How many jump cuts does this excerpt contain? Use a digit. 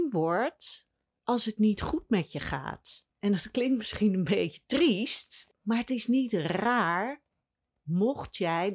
1